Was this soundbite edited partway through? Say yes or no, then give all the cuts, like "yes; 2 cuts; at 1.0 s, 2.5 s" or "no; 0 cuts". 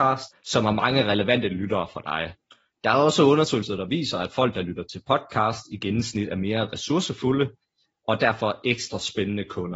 no; 0 cuts